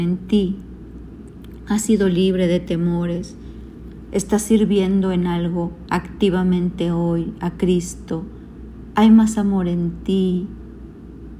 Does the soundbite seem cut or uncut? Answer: cut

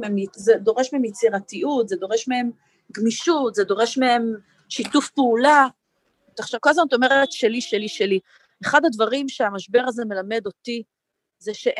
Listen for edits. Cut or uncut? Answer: uncut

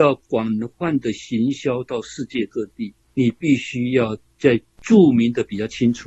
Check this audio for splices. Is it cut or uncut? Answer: uncut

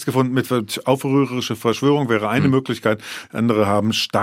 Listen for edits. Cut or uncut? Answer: uncut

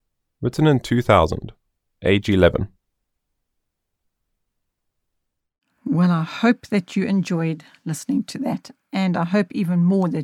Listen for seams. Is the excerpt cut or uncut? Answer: uncut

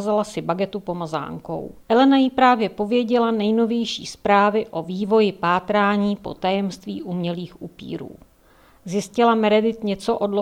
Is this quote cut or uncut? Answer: cut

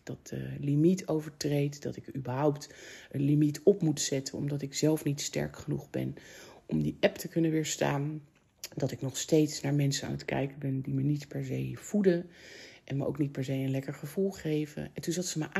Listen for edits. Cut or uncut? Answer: uncut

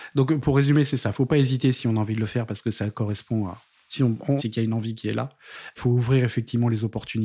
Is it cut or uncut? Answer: cut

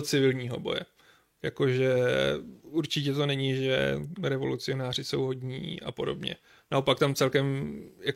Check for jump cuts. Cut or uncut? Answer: uncut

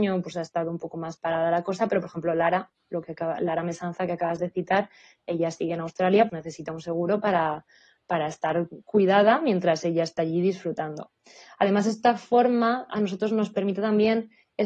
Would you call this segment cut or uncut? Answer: cut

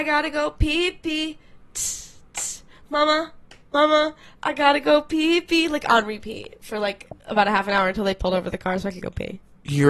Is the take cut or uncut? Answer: uncut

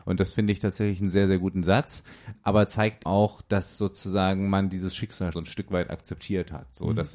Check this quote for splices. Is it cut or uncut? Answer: cut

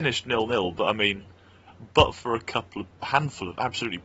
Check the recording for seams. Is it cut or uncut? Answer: cut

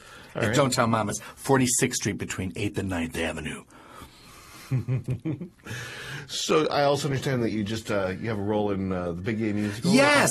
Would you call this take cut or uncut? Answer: uncut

